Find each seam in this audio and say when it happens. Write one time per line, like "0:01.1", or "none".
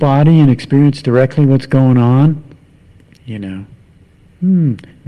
0:03.2